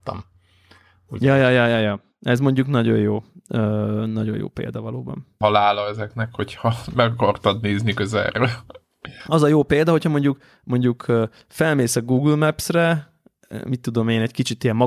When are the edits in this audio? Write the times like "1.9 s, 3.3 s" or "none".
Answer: 5.4 s

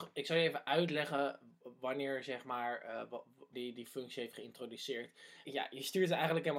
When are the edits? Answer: 3.5 s, 5.4 s

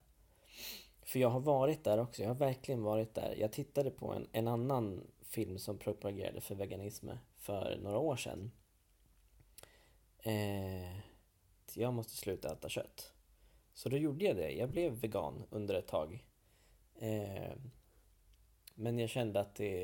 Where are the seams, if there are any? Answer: 11.7 s

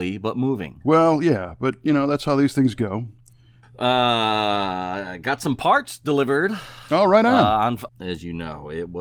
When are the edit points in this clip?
3.6 s, 7.9 s

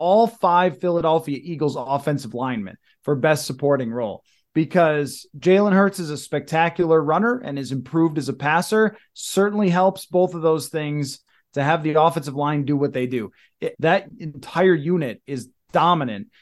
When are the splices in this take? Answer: 13.7 s

